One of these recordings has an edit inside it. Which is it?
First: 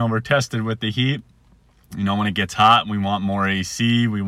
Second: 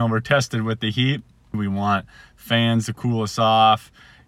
second; 1 cut; at 1.5 s

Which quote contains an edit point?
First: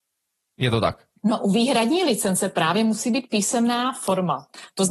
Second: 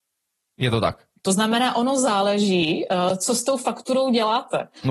second; 1 cut; at 1.2 s

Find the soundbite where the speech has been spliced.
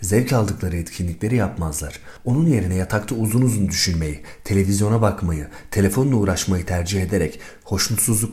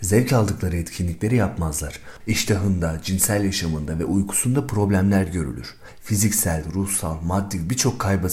second; 1 cut; at 2.2 s

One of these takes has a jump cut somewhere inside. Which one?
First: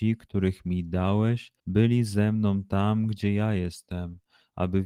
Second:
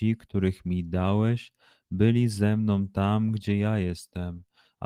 first; 1 cut; at 1.6 s

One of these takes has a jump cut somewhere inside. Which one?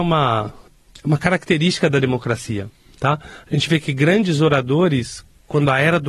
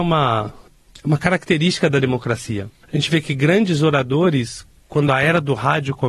second; 1 cut; at 2.8 s

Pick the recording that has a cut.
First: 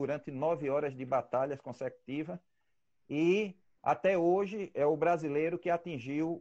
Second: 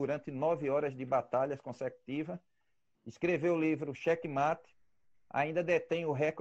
second; 1 cut; at 2.9 s

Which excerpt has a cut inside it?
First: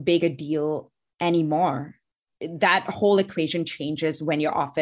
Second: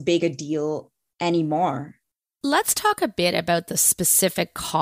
first; 1 cut; at 2.3 s

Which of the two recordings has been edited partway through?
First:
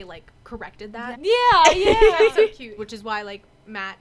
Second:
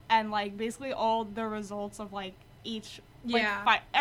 first; 2 cuts; at 1.1 s, 2.8 s

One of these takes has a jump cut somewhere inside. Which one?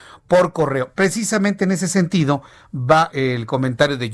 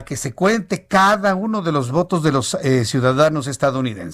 first; 1 cut; at 3.1 s

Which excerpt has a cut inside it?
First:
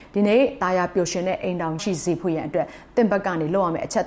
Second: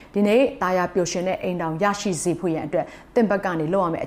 first; 1 cut; at 1.8 s

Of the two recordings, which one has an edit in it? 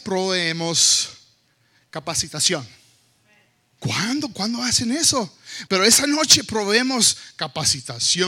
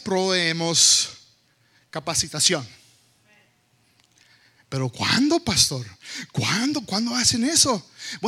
first; 2 cuts; at 3.8 s, 5.7 s

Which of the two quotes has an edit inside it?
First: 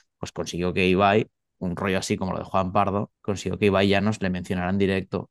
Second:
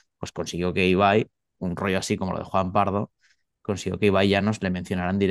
first; 1 cut; at 3.2 s

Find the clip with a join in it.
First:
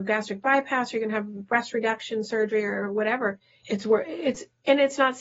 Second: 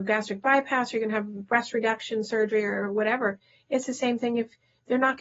first; 1 cut; at 3.6 s

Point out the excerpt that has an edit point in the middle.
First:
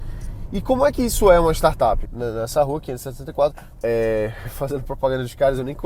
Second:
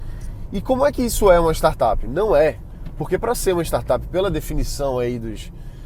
first; 2 cuts; at 2.0 s, 3.7 s

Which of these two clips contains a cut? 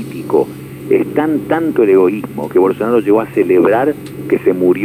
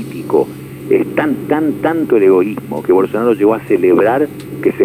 first; 1 cut; at 1.1 s

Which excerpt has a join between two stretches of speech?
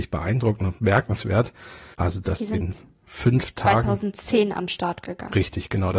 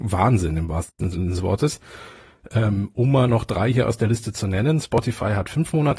first; 1 cut; at 1.9 s

